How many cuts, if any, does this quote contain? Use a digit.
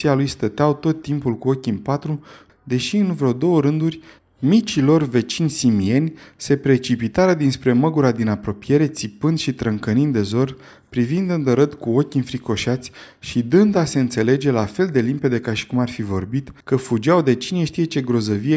2